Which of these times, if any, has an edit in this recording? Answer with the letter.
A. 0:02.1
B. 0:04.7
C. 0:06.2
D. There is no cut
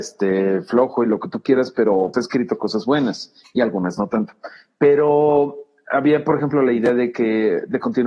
A